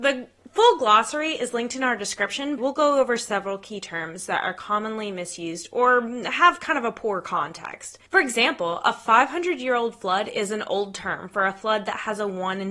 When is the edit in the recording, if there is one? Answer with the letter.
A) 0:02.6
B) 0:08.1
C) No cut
A